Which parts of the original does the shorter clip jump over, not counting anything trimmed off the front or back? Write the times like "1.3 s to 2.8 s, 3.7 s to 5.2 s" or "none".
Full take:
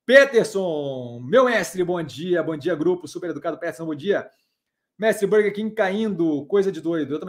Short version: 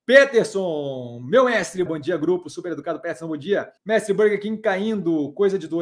1.9 s to 2.4 s, 4.4 s to 4.9 s